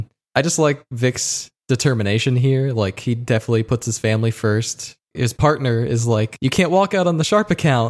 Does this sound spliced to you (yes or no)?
no